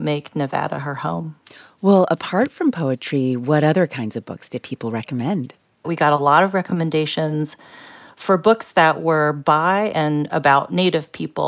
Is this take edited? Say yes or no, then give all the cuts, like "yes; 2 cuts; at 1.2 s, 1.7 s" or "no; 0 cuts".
no; 0 cuts